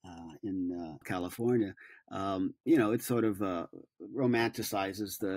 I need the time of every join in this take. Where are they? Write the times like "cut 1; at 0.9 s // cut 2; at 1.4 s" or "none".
cut 1; at 1.0 s